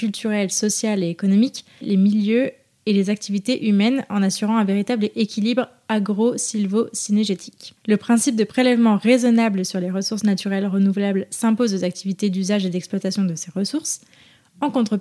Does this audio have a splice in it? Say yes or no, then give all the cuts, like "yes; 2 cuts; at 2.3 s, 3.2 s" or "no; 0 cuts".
yes; 2 cuts; at 1.8 s, 7.8 s